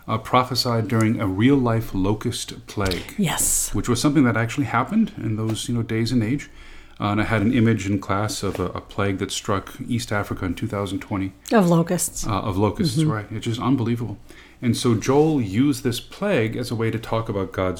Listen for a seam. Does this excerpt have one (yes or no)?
no